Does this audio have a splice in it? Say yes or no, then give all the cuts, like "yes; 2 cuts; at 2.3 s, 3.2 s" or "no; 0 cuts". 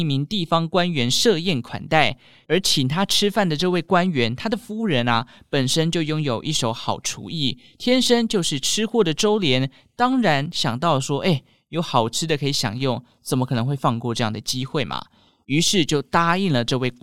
no; 0 cuts